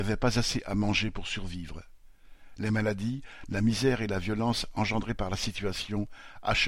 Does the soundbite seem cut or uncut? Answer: uncut